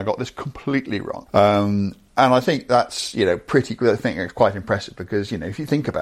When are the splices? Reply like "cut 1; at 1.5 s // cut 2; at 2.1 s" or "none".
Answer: cut 1; at 1.3 s